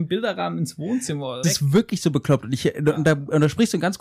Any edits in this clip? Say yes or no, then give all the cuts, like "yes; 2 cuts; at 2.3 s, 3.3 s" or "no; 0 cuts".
yes; 1 cut; at 1.4 s